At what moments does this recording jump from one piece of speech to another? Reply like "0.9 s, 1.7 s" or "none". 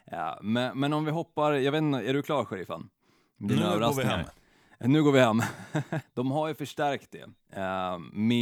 6.0 s